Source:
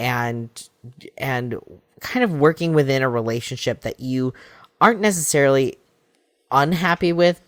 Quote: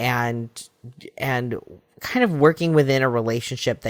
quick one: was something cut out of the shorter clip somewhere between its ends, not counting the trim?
no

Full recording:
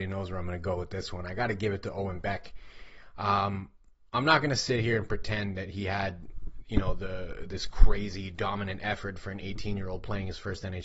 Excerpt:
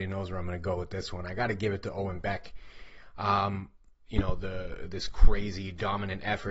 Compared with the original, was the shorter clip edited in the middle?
yes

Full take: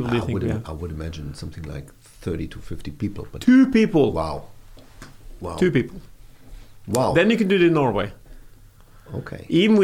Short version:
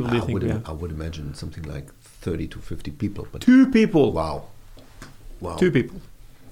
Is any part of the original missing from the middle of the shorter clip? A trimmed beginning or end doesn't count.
no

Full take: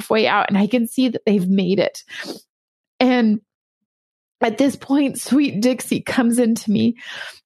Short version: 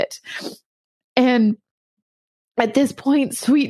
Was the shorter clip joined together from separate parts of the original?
no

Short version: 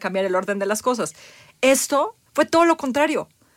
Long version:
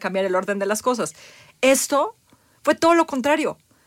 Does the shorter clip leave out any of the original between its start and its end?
yes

